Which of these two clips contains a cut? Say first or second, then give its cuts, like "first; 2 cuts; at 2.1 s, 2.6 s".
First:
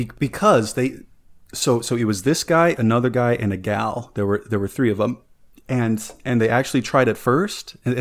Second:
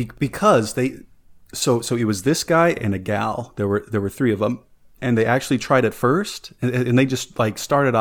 second; 2 cuts; at 2.8 s, 5.0 s